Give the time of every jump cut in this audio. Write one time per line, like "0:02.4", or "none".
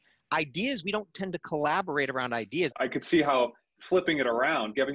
0:02.7